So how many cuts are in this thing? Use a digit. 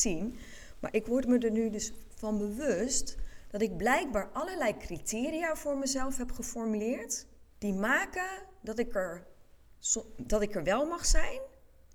1